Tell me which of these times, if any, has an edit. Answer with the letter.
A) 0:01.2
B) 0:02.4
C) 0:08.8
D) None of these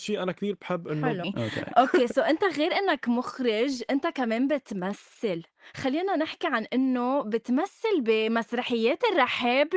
A